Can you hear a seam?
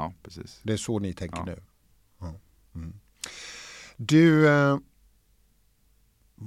no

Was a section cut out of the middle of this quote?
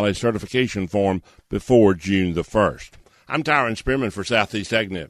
no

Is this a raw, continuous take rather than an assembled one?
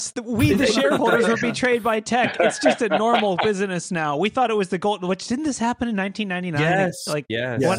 yes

